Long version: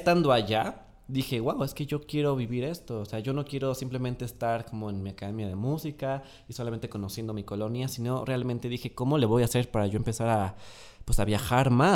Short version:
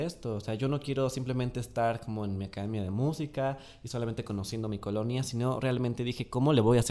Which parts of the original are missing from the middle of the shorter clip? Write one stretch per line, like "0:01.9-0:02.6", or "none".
none

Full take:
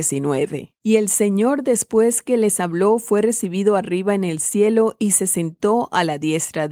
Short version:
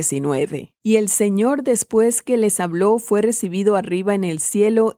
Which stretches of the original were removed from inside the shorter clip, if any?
none

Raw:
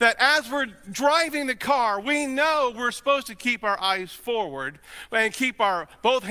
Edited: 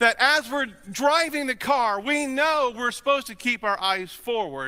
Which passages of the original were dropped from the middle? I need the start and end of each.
none

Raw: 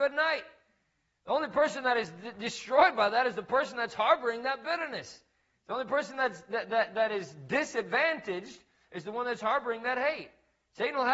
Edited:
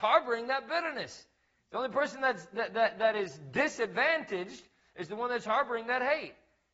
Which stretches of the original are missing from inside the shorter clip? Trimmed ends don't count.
none

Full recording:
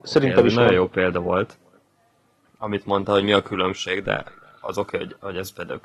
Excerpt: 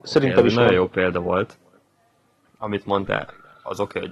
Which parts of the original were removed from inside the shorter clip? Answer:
0:03.1-0:04.0

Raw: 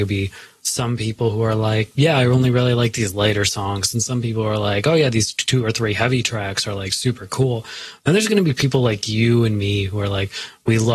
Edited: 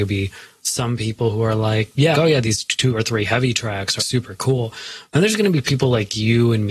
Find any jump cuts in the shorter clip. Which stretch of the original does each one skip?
0:02.1-0:04.8
0:06.7-0:06.9

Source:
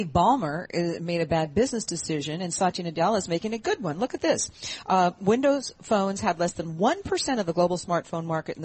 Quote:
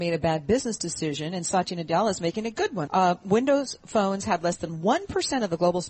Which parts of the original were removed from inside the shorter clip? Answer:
0:03.9-0:04.8

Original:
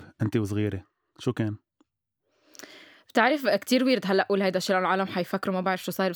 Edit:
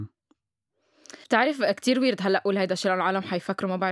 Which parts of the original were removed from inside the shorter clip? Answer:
0:02.7-0:03.1

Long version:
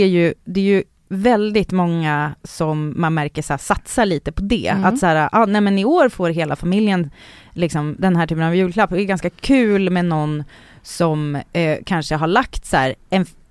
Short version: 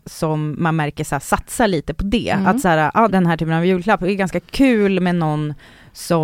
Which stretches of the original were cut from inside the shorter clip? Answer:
0:05.5-0:08.0

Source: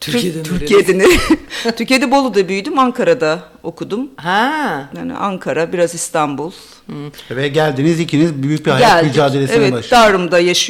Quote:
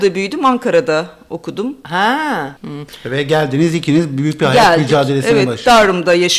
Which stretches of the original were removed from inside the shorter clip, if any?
0:04.9-0:06.8

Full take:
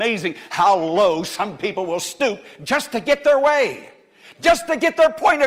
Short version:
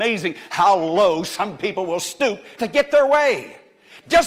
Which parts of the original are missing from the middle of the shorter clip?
0:02.6-0:02.9

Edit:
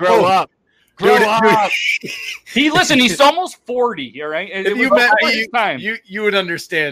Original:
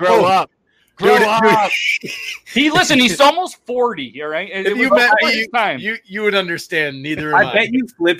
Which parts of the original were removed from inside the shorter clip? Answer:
none

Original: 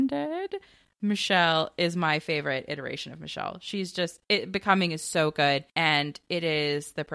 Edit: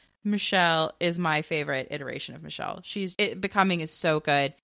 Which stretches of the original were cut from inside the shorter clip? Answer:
0:03.9-0:04.3

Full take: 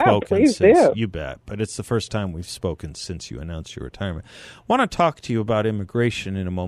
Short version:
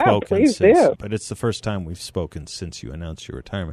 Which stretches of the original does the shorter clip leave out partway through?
0:00.9-0:01.4

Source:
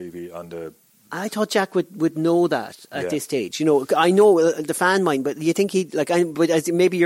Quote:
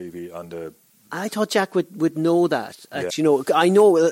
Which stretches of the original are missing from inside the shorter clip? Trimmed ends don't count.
0:03.1-0:03.5

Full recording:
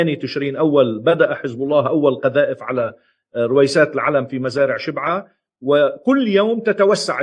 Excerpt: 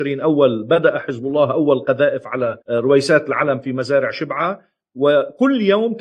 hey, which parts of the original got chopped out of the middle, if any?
0:03.0-0:03.3

